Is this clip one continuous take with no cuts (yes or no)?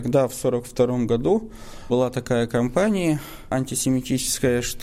yes